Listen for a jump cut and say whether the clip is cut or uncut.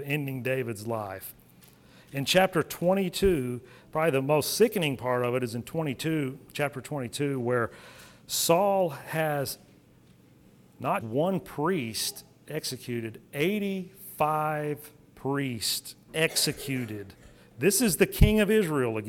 cut